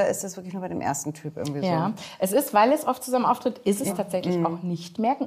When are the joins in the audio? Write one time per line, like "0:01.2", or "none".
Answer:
0:03.9

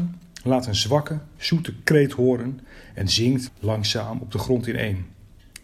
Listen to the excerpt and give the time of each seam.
0:03.5

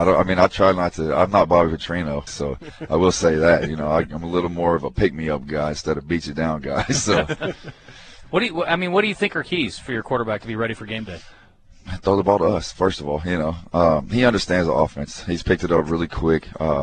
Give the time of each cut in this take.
0:02.3

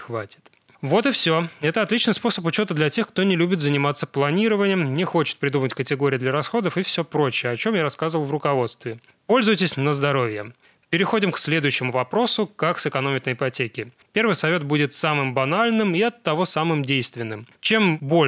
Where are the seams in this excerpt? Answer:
0:14.0

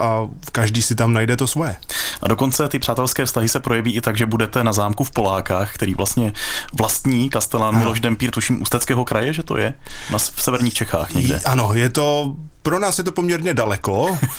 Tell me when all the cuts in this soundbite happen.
0:08.3

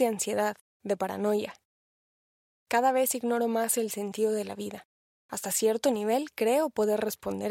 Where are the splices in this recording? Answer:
0:05.1

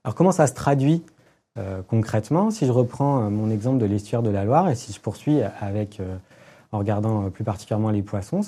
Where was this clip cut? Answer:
none

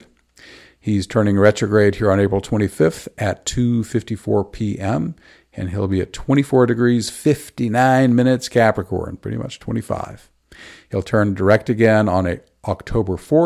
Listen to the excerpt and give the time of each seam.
none

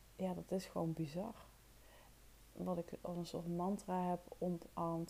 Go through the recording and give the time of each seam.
0:02.5

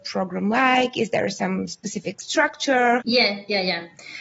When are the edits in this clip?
0:03.0

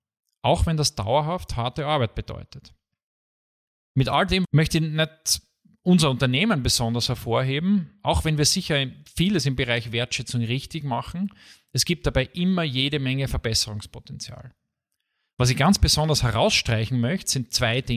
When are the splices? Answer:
0:04.4

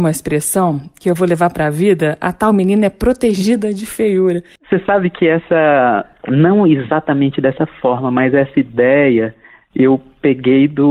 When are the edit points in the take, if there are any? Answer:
0:04.6

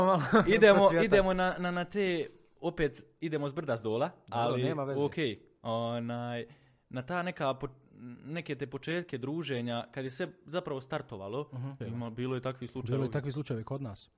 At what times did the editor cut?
0:11.8

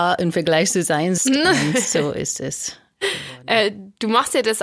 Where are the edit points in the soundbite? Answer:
0:01.2

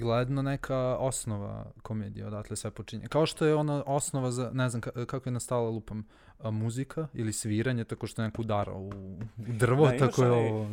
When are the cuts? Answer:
none

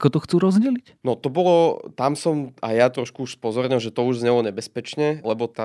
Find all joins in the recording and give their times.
none

